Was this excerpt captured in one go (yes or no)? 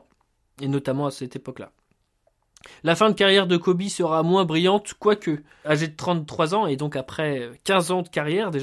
no